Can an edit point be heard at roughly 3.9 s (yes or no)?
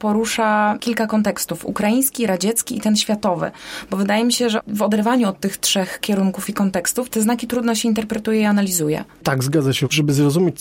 no